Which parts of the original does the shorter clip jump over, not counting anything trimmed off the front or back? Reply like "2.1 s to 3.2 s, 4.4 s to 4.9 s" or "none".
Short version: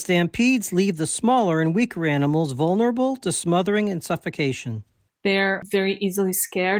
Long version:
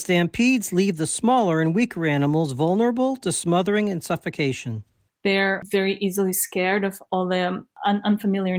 none